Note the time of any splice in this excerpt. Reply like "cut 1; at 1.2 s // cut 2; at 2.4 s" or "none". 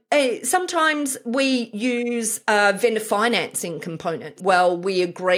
cut 1; at 4.4 s